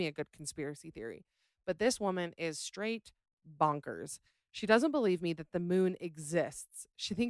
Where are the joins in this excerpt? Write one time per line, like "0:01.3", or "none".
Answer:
none